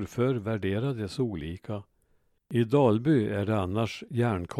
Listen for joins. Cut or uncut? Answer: cut